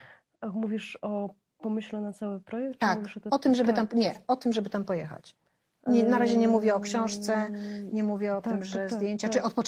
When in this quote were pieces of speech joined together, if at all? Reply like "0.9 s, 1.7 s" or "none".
none